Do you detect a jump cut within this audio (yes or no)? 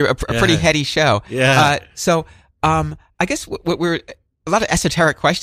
no